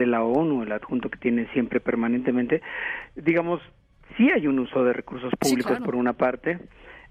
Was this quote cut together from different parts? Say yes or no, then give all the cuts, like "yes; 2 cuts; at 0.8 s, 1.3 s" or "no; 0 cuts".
no; 0 cuts